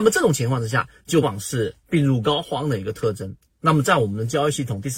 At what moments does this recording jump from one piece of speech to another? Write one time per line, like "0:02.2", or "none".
0:01.2